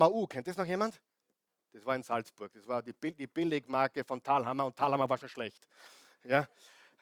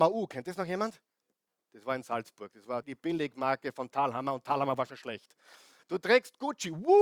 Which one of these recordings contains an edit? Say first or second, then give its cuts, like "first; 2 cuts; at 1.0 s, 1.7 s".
second; 2 cuts; at 2.8 s, 5.8 s